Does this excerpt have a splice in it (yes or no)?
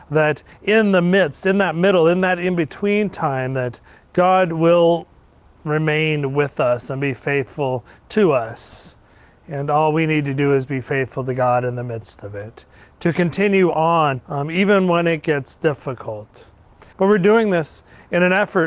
yes